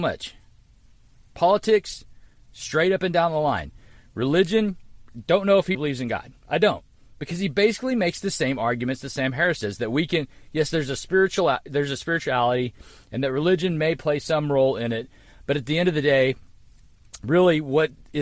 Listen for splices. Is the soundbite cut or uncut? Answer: cut